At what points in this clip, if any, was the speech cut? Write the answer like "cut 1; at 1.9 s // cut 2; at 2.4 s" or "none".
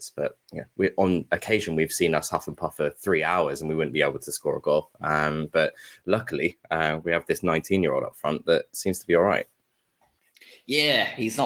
none